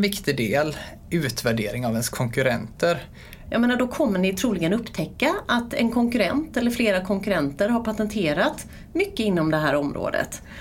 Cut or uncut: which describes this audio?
cut